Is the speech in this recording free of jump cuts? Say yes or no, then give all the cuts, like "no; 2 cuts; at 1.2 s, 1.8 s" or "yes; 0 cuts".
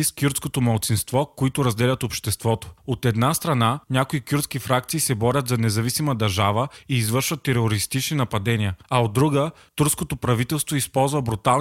yes; 0 cuts